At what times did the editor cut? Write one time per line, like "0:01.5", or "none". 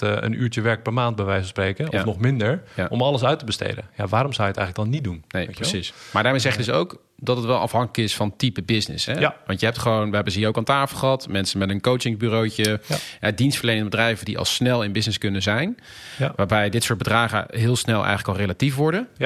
none